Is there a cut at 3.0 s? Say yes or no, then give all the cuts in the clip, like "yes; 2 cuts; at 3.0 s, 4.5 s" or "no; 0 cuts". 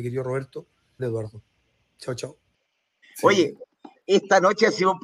yes; 2 cuts; at 1.0 s, 3.0 s